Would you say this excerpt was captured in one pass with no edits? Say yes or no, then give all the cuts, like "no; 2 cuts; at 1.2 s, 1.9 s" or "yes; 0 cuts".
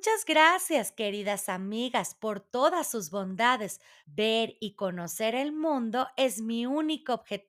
no; 1 cut; at 4.0 s